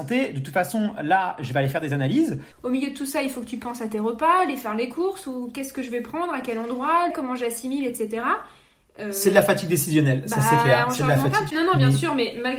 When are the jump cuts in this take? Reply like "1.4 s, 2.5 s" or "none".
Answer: 2.5 s, 7.1 s, 11.5 s